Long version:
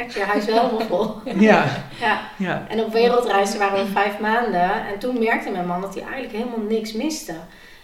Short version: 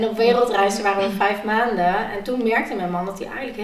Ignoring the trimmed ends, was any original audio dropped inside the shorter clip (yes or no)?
no